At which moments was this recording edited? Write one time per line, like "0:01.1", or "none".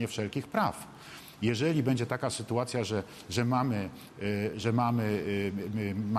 none

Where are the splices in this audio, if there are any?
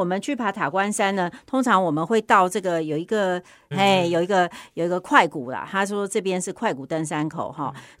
0:03.7

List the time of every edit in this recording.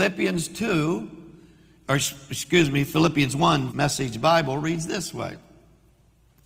0:03.7

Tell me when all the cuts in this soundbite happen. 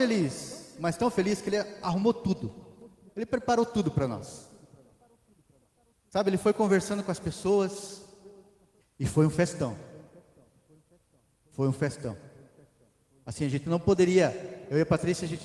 0:08.8

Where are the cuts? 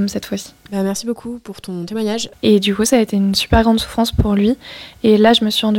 0:02.3

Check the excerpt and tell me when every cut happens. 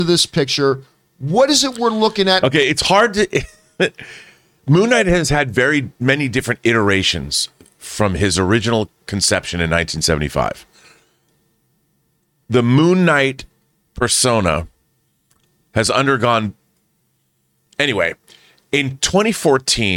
0:02.4

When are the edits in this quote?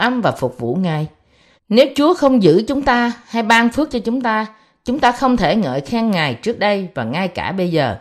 0:01.6

